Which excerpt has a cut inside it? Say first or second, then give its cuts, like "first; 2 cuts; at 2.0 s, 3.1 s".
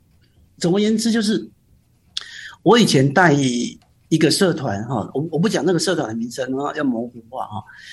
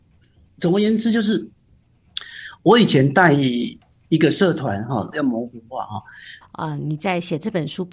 second; 2 cuts; at 5.1 s, 6.4 s